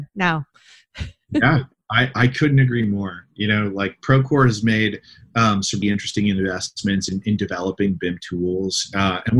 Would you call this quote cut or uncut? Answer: cut